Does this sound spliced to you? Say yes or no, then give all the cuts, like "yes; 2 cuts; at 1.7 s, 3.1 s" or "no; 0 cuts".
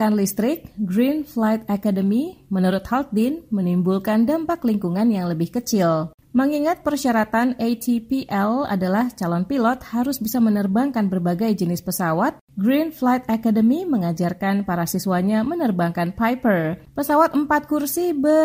yes; 1 cut; at 6.2 s